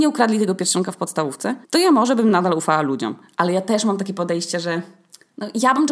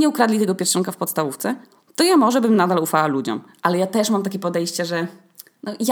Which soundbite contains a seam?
first; 1 cut; at 1.6 s

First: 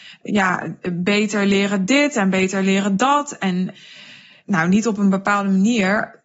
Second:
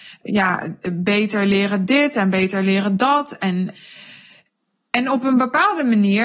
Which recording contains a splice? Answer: first; 1 cut; at 4.4 s

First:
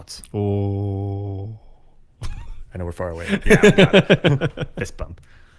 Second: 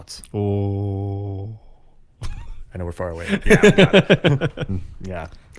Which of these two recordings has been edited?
second; 1 cut; at 4.7 s

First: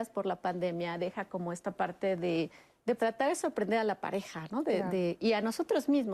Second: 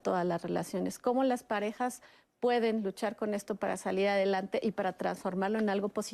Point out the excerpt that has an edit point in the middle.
first; 1 cut; at 3.0 s

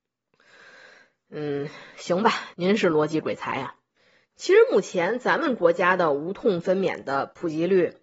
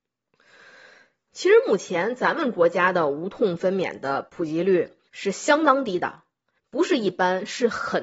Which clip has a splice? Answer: second; 1 cut; at 1.3 s

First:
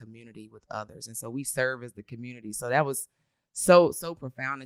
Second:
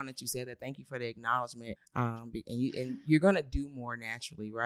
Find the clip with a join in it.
second; 1 cut; at 1.8 s

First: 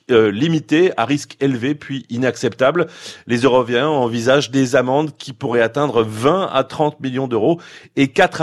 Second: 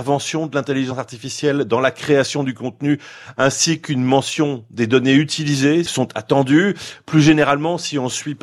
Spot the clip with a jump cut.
second; 1 cut; at 5.9 s

